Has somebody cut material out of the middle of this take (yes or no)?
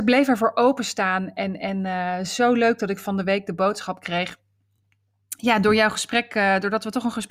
no